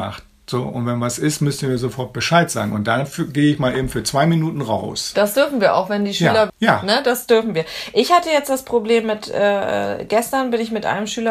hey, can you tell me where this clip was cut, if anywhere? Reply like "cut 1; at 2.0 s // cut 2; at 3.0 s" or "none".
cut 1; at 6.5 s